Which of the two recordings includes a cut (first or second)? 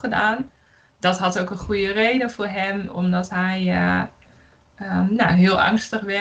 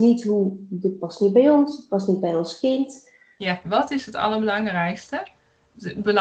second